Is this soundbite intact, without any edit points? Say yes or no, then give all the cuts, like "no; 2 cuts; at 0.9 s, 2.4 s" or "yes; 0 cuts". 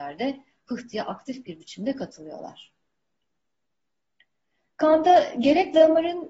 yes; 0 cuts